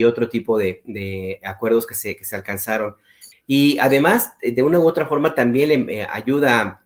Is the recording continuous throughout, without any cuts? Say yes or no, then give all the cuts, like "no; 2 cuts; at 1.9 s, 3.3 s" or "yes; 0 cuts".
no; 1 cut; at 3.3 s